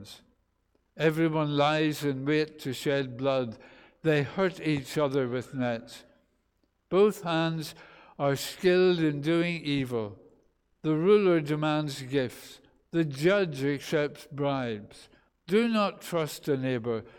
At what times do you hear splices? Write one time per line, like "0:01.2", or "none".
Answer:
0:15.3